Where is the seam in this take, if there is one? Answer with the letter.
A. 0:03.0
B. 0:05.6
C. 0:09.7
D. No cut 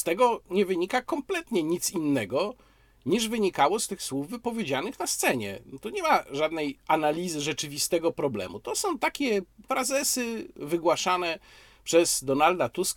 C